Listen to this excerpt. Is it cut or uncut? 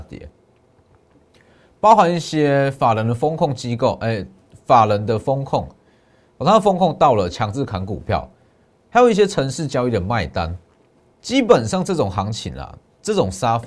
cut